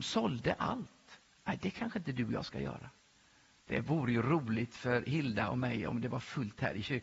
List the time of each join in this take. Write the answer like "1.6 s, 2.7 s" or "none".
3.6 s